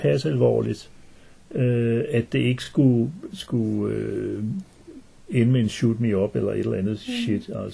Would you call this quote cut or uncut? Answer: uncut